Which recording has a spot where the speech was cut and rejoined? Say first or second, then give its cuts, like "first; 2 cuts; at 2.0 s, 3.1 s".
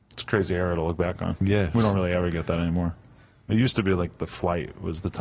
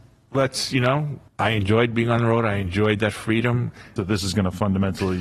second; 2 cuts; at 1.3 s, 4.0 s